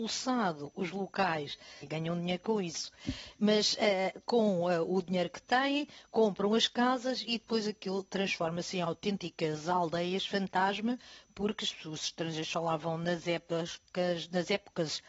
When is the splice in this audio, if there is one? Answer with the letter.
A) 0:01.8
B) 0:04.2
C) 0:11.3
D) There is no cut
A